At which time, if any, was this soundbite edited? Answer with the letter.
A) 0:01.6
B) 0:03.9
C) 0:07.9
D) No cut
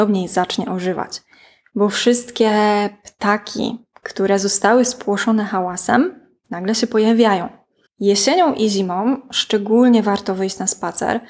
C